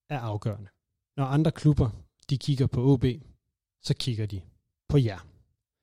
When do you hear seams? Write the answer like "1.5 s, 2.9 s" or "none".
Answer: 1.1 s